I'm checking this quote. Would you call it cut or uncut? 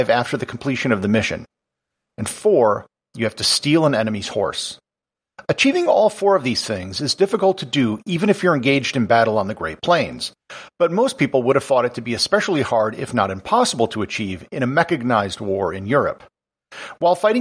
uncut